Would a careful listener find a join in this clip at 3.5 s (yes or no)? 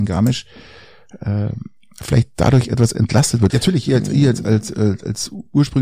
yes